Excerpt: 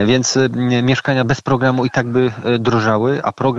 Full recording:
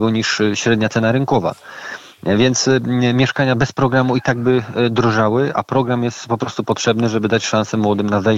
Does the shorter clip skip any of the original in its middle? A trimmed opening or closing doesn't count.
no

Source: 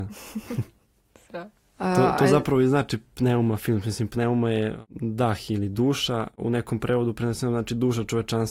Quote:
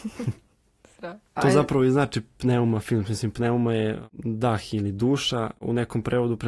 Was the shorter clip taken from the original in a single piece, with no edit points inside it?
no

